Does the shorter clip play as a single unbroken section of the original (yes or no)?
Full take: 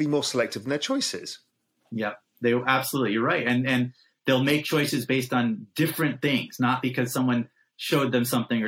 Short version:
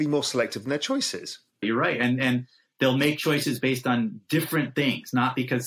no